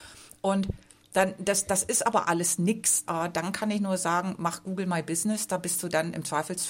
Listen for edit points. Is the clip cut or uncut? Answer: cut